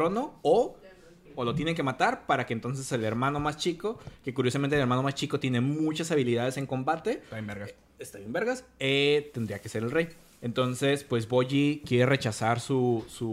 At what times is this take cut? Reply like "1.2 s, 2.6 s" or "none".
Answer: 1.2 s